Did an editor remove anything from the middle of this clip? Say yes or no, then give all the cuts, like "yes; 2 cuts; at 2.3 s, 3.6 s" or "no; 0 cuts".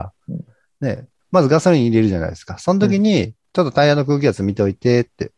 yes; 1 cut; at 1.2 s